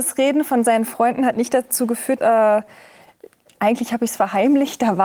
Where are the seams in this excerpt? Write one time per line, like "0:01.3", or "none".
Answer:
0:02.2
0:03.5